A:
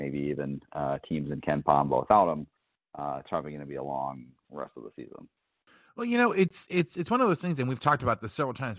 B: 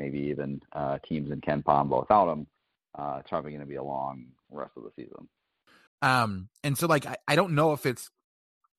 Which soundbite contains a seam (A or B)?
B